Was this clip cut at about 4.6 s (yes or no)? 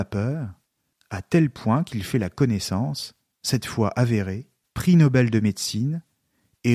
yes